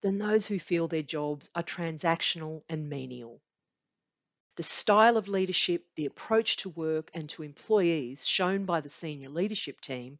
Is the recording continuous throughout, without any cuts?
no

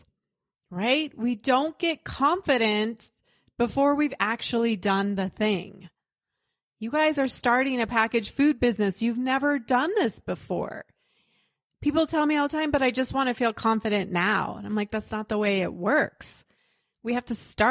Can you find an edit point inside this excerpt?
no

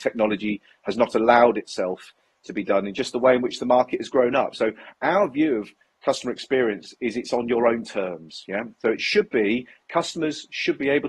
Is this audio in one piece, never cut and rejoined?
yes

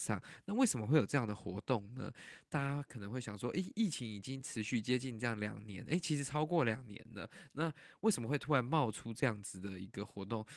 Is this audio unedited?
yes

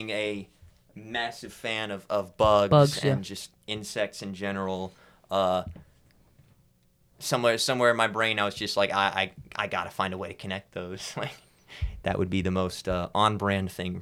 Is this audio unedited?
yes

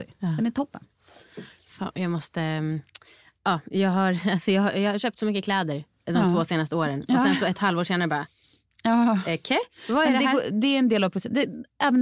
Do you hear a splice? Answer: no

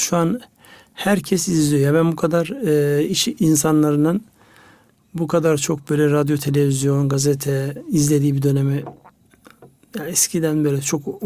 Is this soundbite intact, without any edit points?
yes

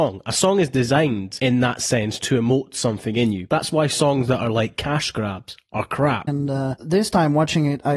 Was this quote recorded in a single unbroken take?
no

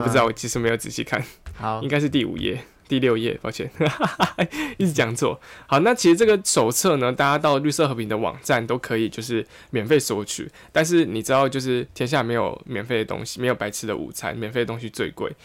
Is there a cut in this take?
no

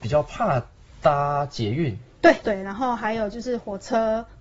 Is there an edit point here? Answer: yes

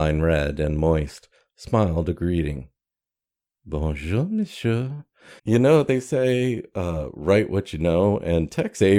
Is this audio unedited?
no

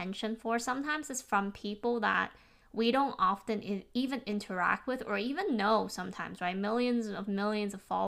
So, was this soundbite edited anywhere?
no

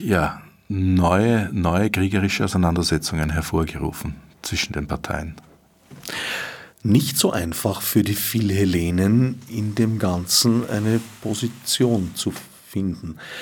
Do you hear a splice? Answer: yes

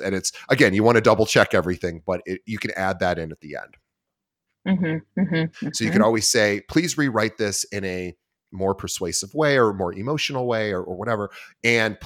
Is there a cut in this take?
yes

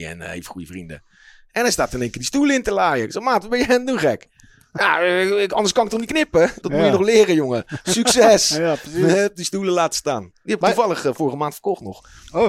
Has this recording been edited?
yes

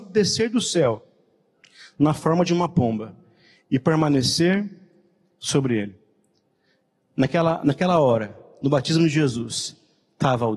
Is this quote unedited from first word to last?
yes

